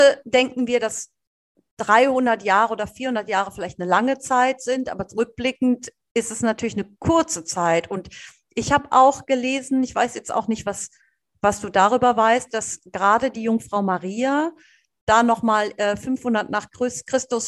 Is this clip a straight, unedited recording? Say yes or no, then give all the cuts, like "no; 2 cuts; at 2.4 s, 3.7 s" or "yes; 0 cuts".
yes; 0 cuts